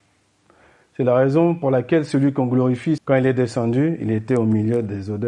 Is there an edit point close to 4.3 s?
no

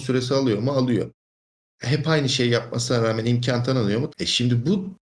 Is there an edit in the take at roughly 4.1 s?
yes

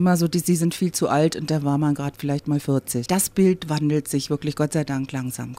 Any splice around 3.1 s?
yes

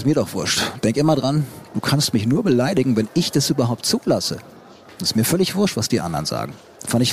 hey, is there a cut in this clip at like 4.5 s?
no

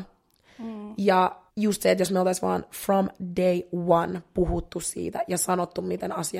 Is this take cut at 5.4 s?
no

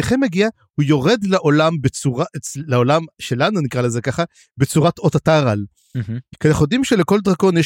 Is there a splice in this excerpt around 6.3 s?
yes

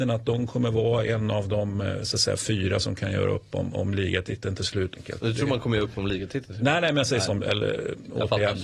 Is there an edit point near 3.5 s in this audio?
no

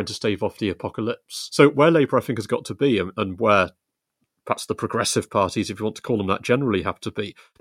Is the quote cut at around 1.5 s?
no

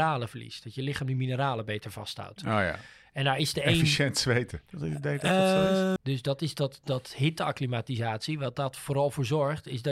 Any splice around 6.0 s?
yes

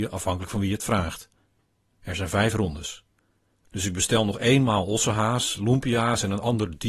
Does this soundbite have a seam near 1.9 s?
yes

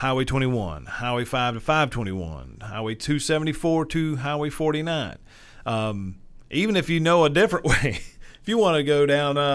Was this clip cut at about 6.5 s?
no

